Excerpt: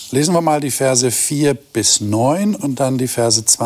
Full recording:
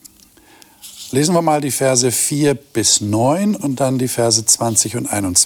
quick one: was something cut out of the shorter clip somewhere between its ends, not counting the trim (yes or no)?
no